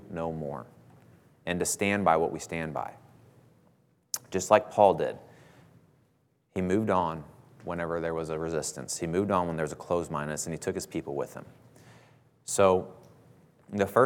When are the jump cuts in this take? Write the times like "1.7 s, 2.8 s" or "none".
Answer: none